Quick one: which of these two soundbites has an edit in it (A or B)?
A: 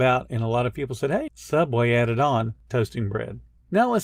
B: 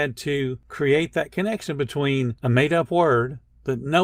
A